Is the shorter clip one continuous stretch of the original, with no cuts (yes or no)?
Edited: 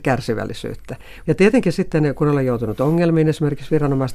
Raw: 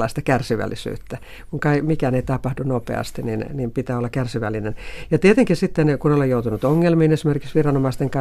no